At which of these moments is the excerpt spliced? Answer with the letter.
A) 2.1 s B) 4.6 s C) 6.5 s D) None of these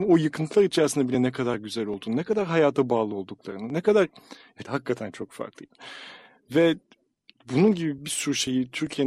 B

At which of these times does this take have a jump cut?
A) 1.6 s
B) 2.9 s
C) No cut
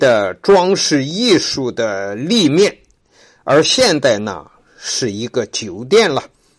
C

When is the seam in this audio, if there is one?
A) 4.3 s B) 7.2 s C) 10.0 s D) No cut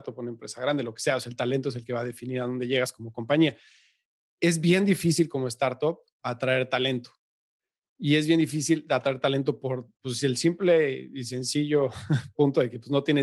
D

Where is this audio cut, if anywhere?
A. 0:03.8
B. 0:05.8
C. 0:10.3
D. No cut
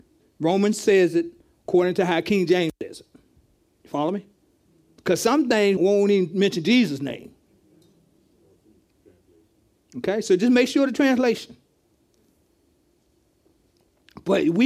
B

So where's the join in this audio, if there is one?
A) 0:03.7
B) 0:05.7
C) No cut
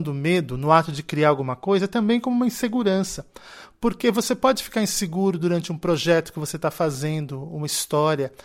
C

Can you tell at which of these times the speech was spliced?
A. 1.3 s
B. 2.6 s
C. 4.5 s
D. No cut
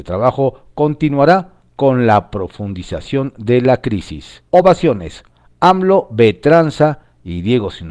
C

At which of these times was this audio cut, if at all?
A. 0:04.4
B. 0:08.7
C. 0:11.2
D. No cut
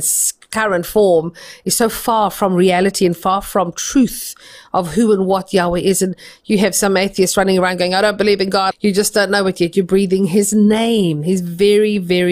B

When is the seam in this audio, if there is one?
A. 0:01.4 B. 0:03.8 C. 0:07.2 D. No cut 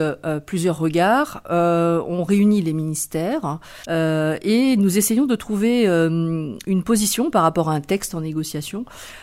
B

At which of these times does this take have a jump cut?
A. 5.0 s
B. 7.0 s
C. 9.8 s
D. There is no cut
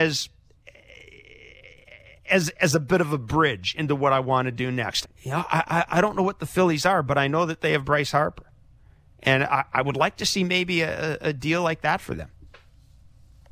A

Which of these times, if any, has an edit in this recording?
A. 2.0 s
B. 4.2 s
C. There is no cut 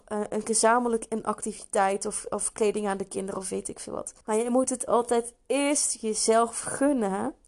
B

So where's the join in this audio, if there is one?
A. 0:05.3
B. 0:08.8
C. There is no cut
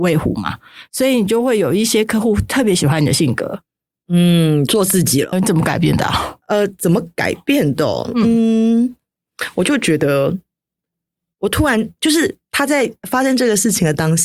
A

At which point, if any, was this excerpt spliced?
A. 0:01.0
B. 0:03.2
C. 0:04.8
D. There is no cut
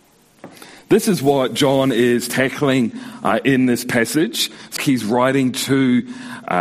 C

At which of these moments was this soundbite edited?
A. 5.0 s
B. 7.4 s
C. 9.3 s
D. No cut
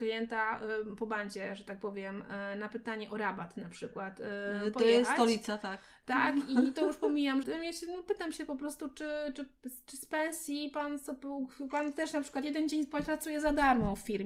B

